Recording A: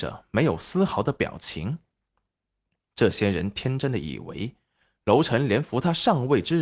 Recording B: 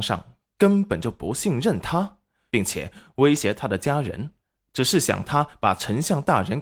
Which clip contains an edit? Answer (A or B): B